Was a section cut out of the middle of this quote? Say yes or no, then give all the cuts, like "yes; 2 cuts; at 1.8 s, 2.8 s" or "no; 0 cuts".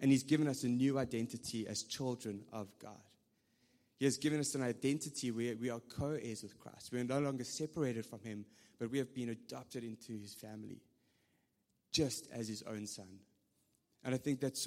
no; 0 cuts